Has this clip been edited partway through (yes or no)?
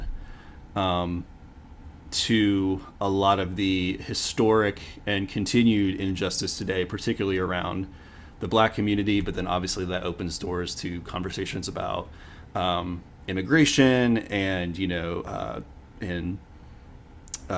no